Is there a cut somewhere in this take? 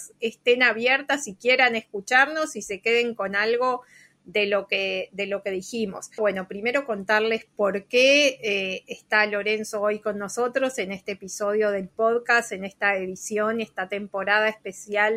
yes; 1 cut; at 6.2 s

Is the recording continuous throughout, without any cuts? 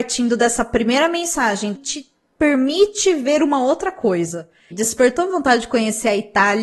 no; 2 cuts; at 1.7 s, 4.7 s

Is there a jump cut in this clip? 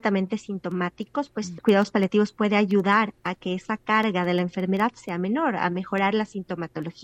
no; 0 cuts

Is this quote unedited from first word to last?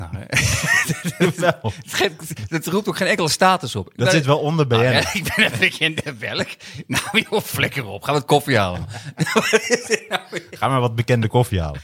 yes; 0 cuts

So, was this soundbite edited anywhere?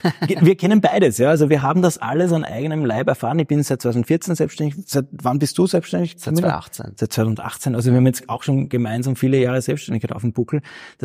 no; 0 cuts

